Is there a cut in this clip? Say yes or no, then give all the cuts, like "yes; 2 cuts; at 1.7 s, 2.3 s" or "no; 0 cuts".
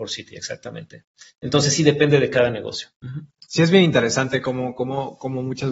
no; 0 cuts